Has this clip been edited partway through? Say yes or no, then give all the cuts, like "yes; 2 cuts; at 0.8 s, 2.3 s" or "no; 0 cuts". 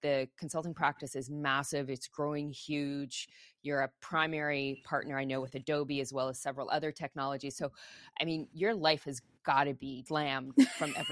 yes; 1 cut; at 10.1 s